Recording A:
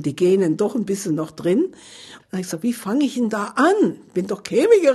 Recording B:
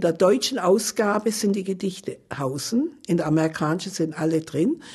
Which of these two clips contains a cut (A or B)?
A